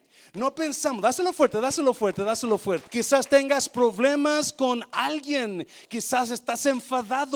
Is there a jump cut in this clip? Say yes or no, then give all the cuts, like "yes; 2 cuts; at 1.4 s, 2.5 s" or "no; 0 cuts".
yes; 1 cut; at 2.9 s